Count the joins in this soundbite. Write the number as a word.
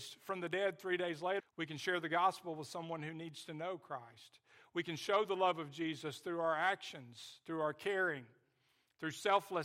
one